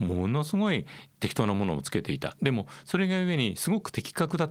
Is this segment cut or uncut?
uncut